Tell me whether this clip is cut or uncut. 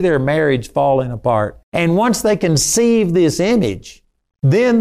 cut